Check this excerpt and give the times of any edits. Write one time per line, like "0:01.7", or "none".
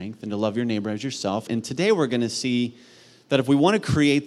0:01.5